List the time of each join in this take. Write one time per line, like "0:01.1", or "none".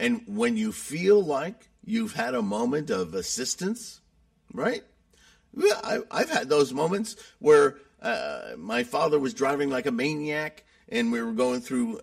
none